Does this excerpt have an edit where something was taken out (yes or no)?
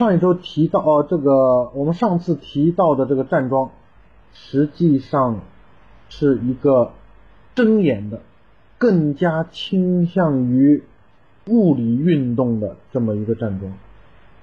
no